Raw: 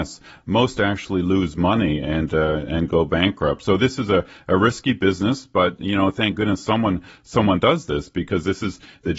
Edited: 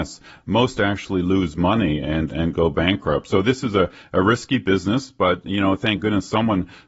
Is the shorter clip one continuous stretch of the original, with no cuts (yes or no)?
no